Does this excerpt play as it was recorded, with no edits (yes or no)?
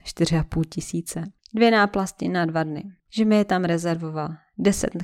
no